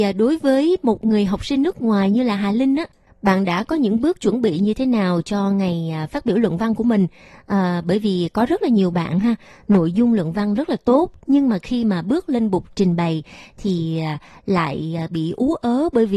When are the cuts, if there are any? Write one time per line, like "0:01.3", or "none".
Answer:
none